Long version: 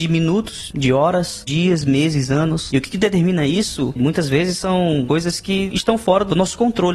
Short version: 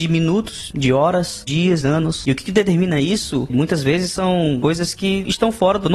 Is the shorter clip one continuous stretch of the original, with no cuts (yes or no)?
no